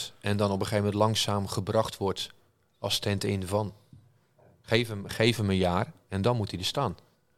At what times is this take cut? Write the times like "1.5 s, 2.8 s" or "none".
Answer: 5.1 s